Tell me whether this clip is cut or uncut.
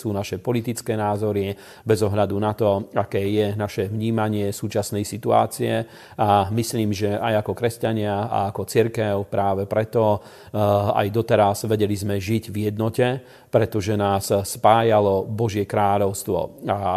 uncut